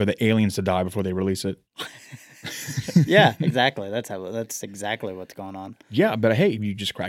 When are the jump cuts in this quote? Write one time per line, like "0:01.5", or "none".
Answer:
none